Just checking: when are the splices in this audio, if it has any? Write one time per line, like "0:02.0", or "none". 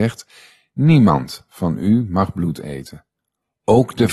none

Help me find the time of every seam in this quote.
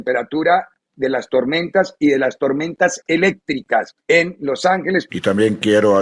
0:04.0
0:05.1

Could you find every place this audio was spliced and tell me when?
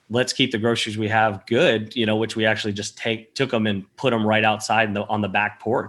none

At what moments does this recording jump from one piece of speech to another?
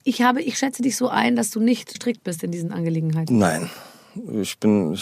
0:01.9

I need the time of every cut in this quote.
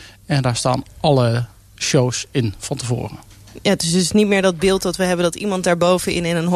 none

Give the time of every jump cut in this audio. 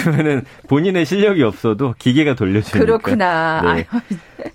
none

